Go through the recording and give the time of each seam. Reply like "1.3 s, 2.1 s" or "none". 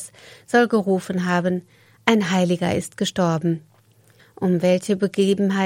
4.2 s